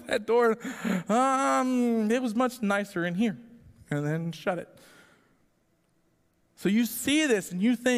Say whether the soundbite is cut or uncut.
uncut